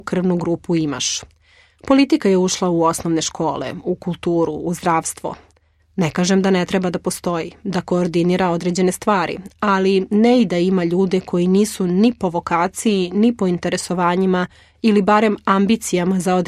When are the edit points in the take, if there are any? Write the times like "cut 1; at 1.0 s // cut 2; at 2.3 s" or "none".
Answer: none